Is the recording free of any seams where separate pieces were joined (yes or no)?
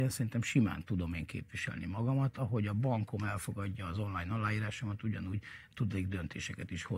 yes